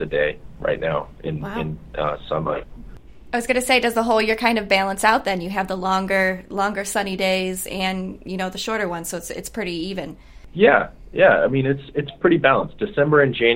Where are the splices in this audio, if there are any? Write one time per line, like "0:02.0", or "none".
none